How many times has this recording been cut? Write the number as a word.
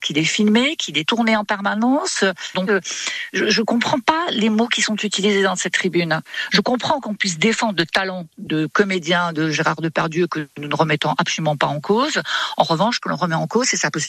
one